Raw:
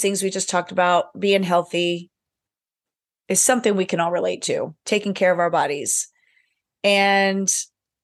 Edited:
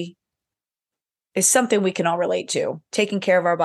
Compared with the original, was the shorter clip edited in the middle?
no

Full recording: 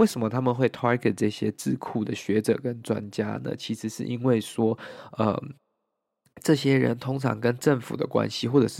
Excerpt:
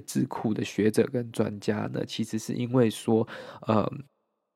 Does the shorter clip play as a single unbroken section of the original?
yes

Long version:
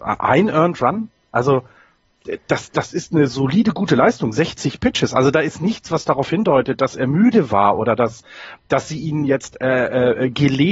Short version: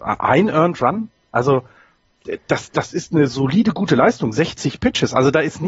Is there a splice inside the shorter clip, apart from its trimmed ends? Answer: no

